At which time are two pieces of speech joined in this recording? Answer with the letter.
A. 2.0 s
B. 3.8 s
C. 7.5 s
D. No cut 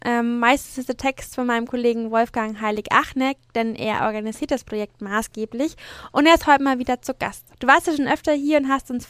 C